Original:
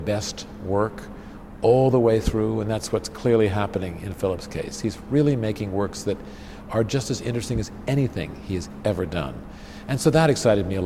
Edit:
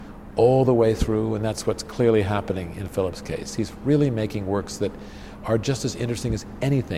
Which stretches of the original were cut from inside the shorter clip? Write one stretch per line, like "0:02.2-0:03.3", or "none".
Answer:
none